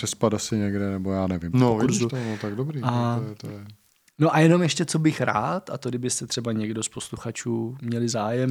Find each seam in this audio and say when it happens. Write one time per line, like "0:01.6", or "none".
0:01.5